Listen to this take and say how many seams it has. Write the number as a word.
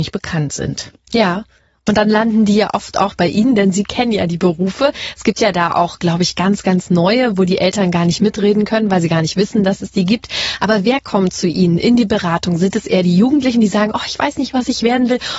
zero